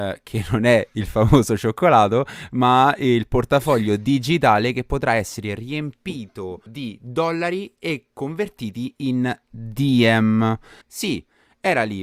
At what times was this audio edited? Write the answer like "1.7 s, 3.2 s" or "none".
6.7 s, 10.8 s